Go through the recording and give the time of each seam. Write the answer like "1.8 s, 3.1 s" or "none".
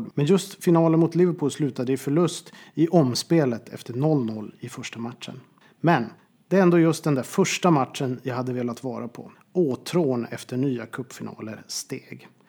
9.3 s